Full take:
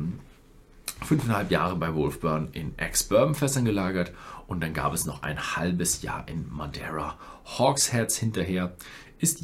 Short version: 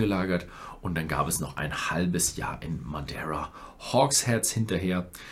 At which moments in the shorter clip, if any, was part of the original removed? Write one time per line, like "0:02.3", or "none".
none

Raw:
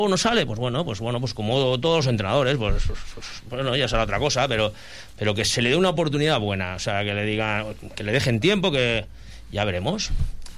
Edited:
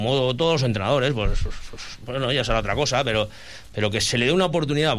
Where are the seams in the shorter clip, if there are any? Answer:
none

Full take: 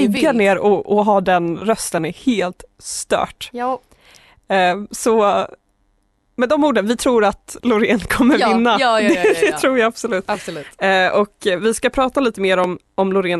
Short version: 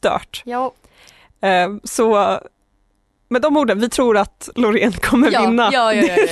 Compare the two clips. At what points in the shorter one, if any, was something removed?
none

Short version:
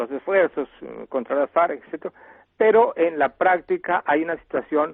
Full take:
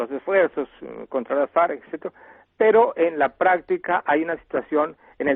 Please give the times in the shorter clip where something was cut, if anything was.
none

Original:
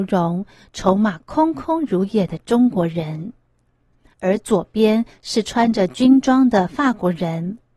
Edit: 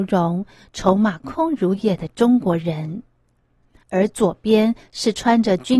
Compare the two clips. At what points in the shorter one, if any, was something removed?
0:01.2

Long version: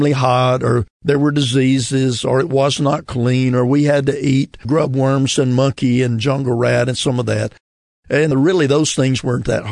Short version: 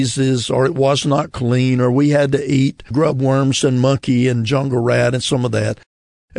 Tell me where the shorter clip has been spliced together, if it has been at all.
none

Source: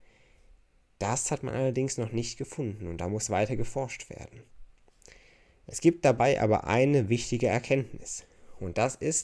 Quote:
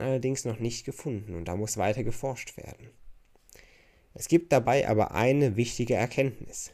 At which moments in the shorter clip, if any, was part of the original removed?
none

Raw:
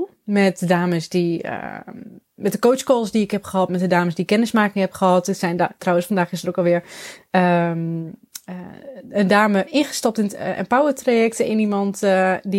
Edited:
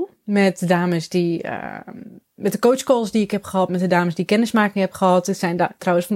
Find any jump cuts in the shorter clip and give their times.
none

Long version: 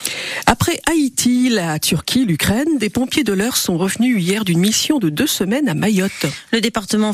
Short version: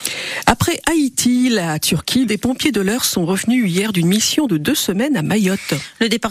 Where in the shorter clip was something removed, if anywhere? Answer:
0:02.3

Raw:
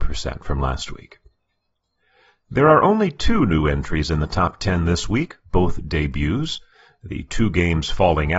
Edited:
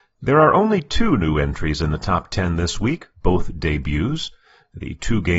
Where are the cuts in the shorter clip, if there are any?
none

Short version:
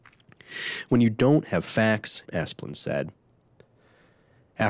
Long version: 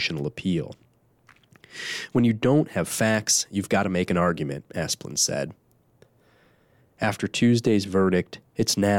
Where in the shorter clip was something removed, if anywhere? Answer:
0:02.2

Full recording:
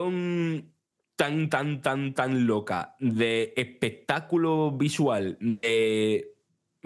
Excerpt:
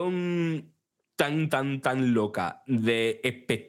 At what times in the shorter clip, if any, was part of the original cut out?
0:01.5

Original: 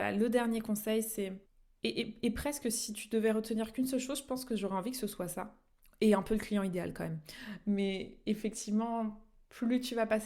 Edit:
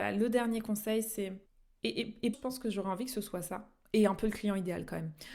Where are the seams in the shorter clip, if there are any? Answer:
0:02.3
0:03.8

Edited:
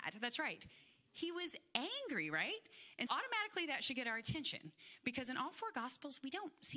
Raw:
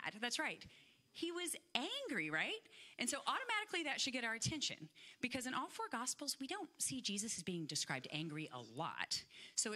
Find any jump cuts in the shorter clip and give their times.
0:03.1

